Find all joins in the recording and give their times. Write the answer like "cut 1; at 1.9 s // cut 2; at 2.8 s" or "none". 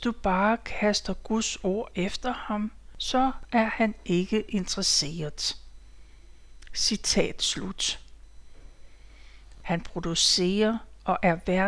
cut 1; at 9.5 s